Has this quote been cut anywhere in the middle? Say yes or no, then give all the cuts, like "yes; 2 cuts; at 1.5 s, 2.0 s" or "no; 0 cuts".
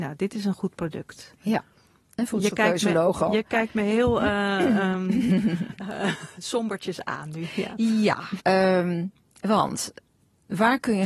yes; 1 cut; at 8.4 s